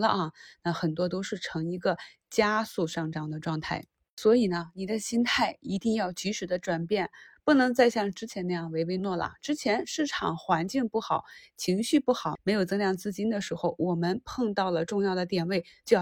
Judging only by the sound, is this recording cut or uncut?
cut